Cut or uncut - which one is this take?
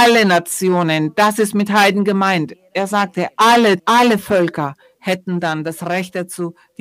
cut